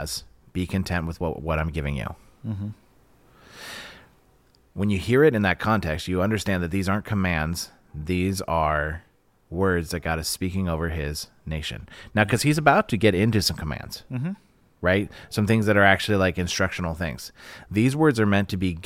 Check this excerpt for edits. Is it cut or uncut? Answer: uncut